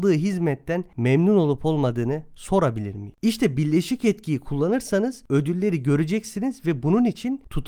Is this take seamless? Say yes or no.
no